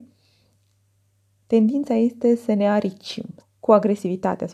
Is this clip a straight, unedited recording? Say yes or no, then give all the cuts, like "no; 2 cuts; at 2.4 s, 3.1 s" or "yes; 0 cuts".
no; 1 cut; at 3.4 s